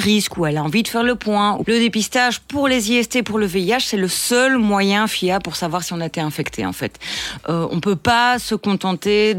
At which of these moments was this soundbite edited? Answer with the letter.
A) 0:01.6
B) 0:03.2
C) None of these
A